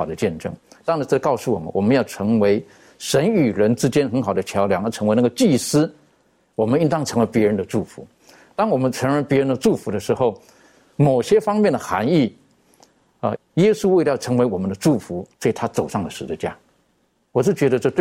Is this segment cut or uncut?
cut